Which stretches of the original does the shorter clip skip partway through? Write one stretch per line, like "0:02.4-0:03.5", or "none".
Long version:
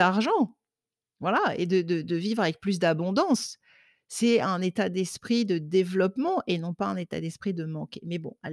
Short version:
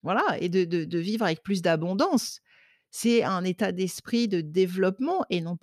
none